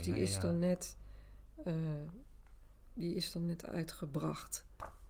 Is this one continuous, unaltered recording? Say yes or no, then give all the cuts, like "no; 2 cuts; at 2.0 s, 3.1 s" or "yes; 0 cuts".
yes; 0 cuts